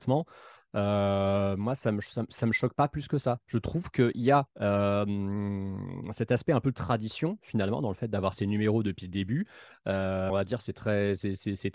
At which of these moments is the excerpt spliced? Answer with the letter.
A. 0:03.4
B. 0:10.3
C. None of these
B